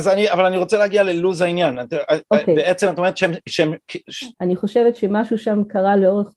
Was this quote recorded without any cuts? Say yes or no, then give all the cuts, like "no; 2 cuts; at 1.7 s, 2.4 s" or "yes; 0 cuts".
no; 1 cut; at 4.3 s